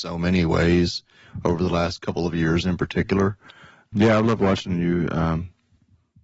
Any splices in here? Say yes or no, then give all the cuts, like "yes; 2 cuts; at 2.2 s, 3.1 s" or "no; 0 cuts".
yes; 1 cut; at 3.9 s